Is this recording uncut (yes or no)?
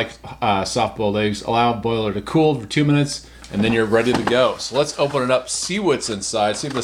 yes